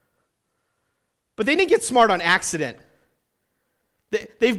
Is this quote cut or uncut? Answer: uncut